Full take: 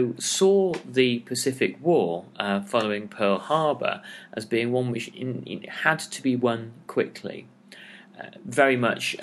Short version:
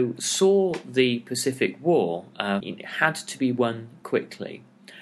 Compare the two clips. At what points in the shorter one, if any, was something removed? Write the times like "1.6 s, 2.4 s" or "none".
2.6 s